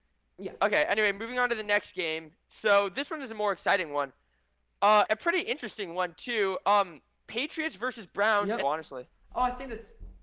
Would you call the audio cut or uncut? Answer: cut